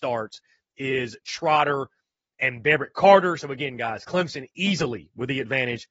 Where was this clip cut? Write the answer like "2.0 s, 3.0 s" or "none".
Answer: none